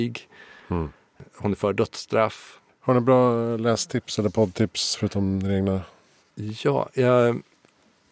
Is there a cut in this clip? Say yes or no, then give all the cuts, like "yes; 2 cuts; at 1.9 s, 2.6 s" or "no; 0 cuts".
yes; 1 cut; at 2.7 s